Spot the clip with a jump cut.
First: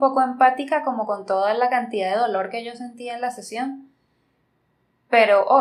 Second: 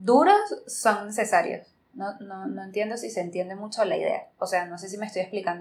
second; 1 cut; at 1.9 s

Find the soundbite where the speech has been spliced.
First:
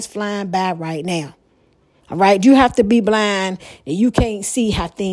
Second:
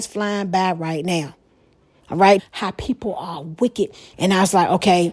second; 2 cuts; at 2.4 s, 4.1 s

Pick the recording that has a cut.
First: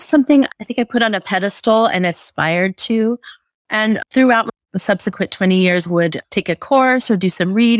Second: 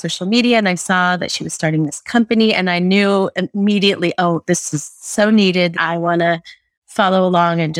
second; 1 cut; at 5.7 s

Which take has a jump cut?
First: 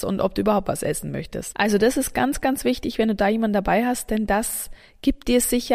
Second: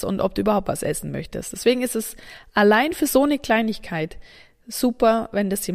first; 1 cut; at 1.5 s

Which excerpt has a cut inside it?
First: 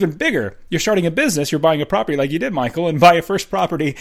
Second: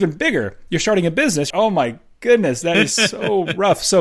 second; 1 cut; at 1.5 s

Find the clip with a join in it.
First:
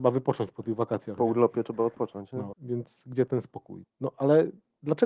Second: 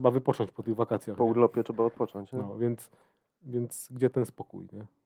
first; 2 cuts; at 2.5 s, 3.8 s

